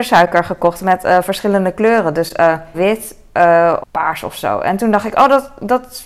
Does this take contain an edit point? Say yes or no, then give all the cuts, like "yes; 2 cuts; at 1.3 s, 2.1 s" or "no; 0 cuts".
yes; 2 cuts; at 2.7 s, 3.8 s